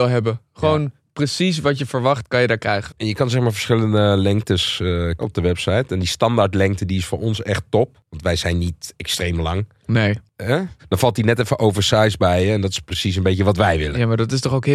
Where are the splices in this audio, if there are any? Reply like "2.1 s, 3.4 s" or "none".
2.9 s, 5.2 s